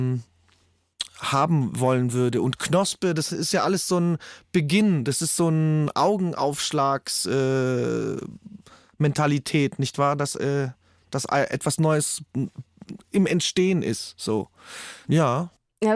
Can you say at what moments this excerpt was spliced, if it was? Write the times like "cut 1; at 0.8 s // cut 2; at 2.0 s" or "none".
cut 1; at 15.0 s